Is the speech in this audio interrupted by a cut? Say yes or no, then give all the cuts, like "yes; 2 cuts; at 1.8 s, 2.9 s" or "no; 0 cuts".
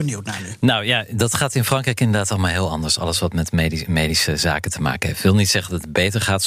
no; 0 cuts